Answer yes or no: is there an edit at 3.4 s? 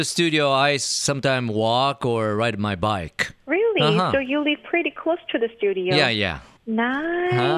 yes